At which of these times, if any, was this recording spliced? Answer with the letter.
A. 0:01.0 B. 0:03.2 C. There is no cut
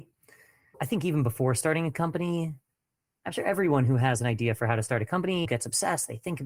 C